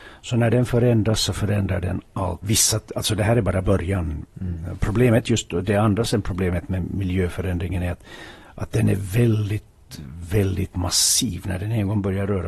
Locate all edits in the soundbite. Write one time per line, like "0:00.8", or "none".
0:02.4